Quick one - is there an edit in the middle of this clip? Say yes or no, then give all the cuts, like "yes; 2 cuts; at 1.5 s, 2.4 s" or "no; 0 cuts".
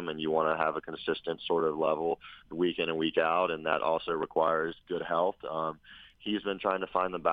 no; 0 cuts